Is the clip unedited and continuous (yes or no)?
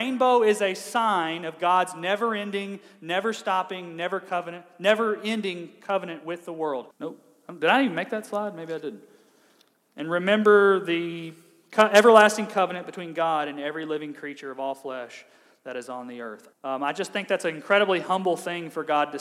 no